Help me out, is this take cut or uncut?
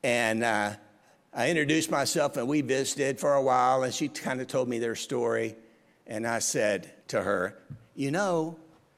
cut